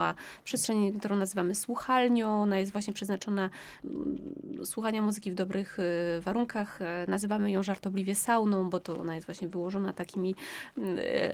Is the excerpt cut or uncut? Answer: uncut